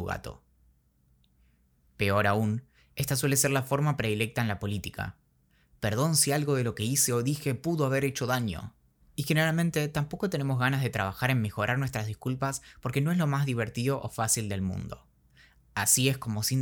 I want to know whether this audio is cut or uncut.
cut